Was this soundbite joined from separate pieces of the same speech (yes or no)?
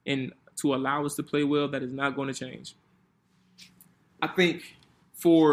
no